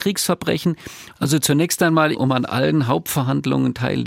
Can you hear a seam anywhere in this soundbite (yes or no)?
yes